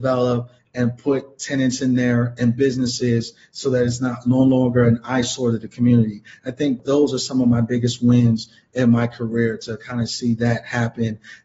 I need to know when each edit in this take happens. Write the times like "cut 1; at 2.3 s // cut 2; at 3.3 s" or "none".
none